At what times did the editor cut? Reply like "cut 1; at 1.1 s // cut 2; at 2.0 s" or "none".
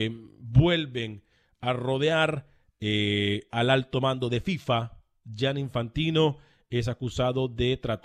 none